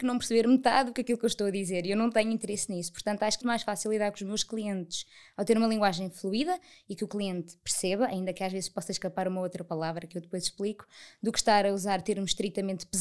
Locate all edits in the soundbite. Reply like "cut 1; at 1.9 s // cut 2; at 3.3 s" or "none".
cut 1; at 3.4 s